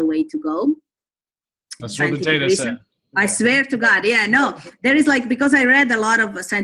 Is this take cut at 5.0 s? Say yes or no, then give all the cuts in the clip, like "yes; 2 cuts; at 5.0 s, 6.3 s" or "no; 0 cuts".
no; 1 cut; at 1.8 s